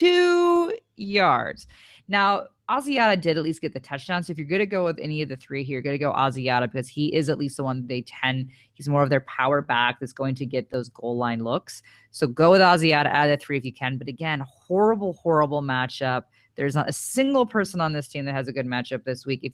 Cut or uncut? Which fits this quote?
uncut